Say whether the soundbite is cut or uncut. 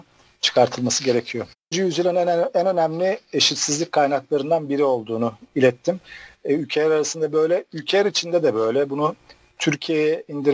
cut